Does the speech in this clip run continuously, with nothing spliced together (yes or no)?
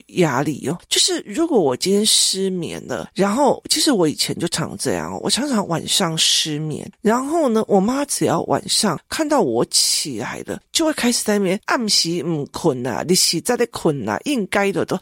yes